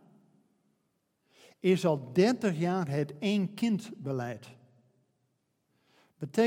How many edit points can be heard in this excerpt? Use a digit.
0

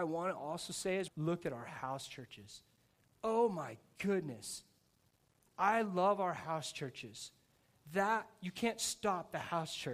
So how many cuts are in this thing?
1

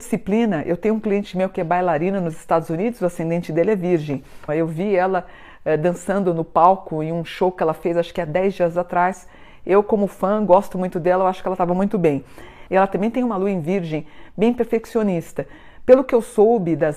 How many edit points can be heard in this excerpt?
2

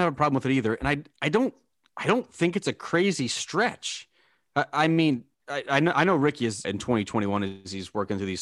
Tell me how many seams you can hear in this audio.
2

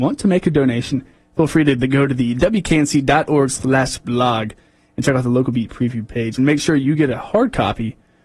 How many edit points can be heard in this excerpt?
1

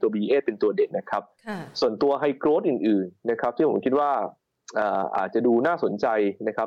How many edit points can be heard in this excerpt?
1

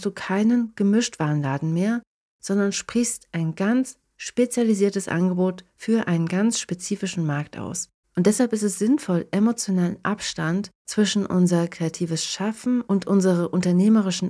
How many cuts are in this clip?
2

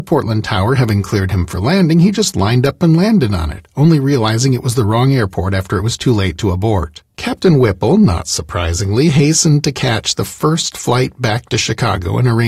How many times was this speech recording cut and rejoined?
1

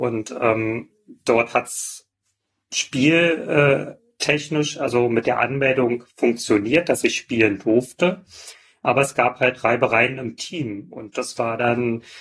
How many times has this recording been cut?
0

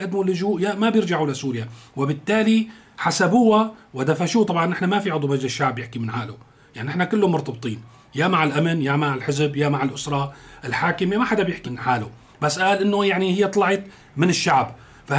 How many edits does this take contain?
1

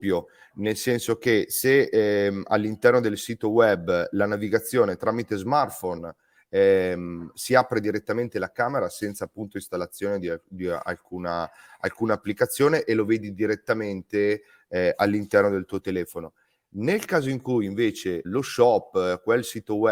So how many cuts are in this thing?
1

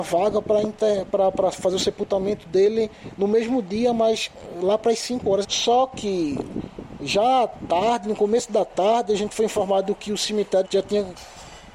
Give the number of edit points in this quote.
2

